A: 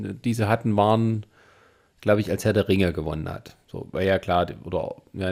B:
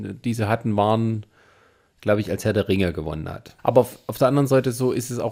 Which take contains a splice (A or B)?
B